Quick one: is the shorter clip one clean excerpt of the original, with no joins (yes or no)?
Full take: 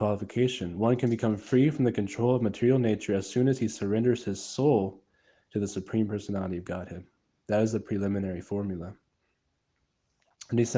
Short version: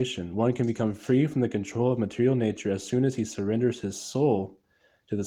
yes